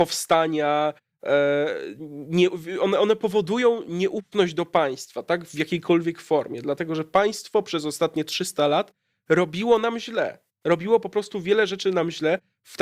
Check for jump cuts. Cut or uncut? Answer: uncut